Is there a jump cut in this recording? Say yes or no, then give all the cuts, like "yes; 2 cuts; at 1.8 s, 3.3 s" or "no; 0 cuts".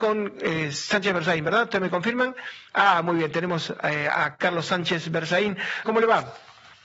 yes; 2 cuts; at 2.7 s, 5.8 s